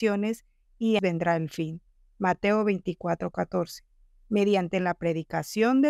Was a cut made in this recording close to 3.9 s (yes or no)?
no